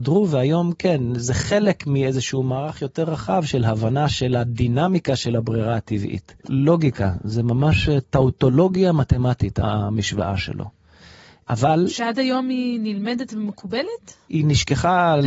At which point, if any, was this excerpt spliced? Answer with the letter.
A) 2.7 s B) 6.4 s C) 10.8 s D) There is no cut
B